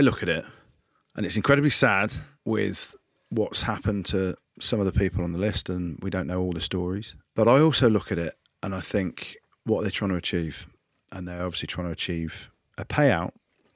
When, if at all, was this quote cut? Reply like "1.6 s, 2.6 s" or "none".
none